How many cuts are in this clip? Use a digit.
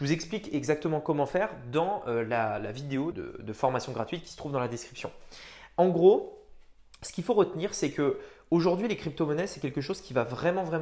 1